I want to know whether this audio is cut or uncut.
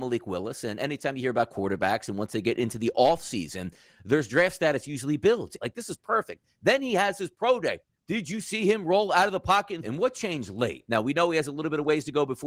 cut